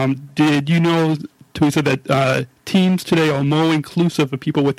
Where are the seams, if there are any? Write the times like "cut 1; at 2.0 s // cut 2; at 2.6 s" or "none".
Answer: none